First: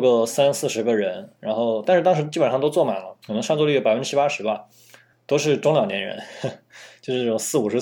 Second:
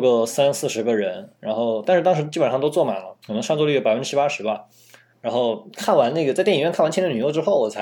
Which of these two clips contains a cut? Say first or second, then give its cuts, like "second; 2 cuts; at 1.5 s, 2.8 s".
second; 1 cut; at 5.1 s